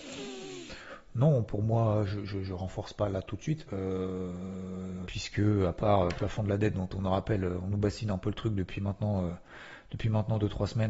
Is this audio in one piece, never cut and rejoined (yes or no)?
no